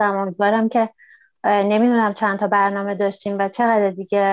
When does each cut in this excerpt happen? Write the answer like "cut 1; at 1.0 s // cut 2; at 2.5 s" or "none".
none